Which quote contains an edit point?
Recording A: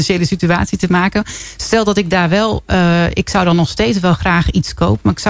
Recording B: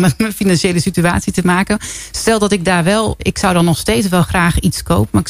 B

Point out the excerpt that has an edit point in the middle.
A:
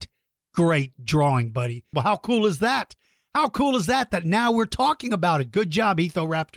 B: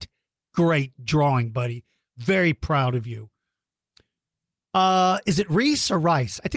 A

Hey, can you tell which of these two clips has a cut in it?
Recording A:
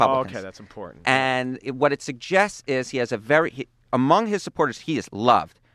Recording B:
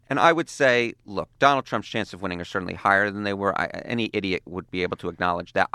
A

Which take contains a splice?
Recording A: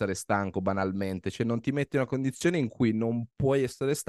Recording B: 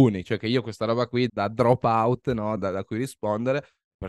B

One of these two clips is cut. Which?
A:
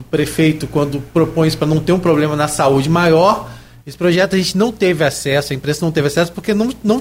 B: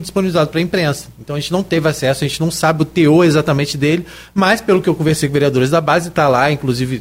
A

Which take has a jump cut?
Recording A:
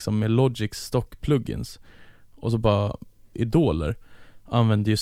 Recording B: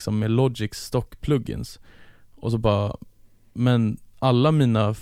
A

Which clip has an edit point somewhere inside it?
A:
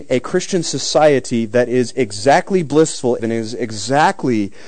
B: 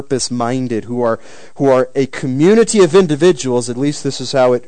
A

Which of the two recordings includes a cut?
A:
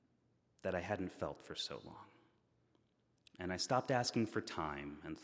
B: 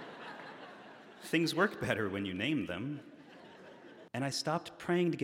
B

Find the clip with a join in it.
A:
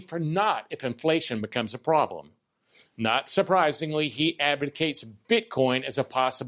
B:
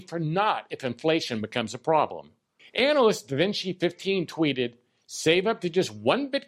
B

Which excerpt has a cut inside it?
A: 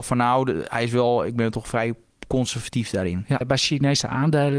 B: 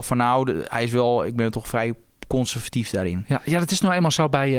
A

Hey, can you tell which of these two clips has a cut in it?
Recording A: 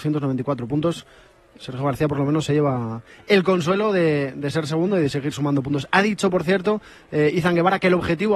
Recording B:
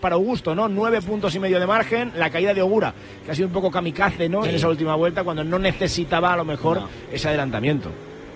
B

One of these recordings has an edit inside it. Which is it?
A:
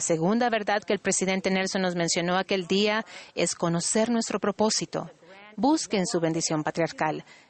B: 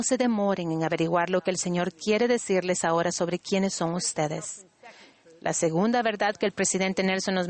A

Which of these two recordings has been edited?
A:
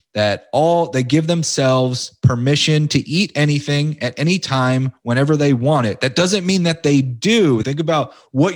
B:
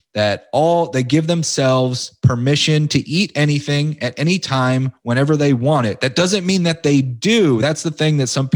A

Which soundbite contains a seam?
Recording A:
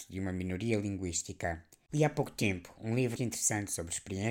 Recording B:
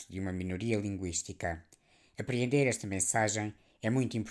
A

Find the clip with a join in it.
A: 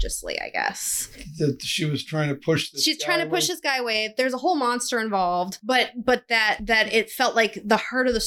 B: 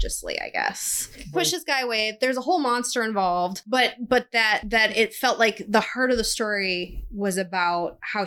B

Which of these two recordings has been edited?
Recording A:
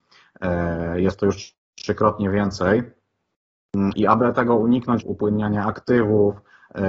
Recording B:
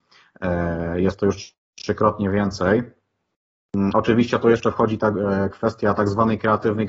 A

